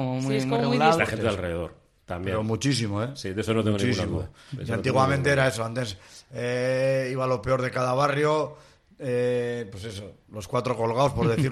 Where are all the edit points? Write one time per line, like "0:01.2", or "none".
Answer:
0:01.0